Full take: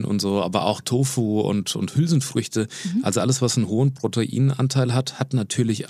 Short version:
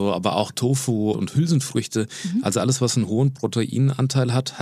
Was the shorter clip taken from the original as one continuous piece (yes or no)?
no